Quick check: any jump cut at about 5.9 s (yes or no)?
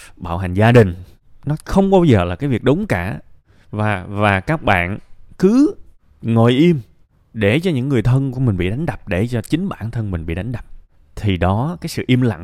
no